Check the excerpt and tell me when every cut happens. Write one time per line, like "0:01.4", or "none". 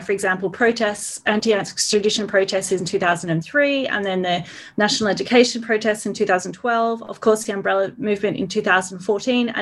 none